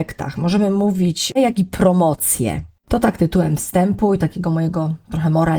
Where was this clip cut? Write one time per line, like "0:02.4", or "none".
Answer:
0:01.4
0:02.8